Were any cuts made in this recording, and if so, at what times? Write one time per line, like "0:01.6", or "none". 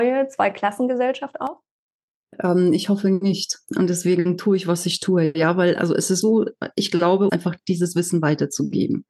0:06.2
0:07.3